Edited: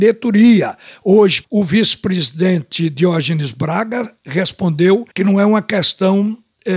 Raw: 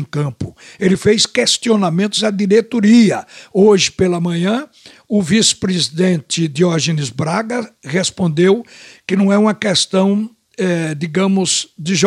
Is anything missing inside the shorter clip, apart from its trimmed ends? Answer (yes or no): yes